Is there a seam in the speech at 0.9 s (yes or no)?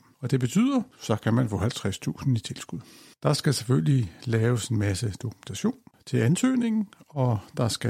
yes